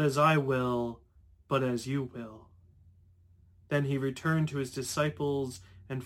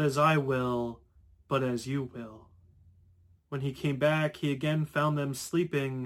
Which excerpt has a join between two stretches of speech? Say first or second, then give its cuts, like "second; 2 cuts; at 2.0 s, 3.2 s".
second; 1 cut; at 3.4 s